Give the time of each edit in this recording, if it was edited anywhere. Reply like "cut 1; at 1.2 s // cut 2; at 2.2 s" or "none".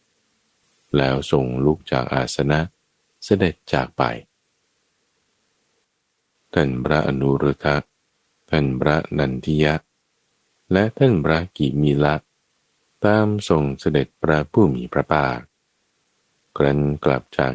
none